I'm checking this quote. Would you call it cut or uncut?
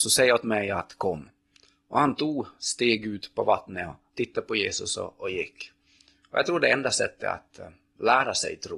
uncut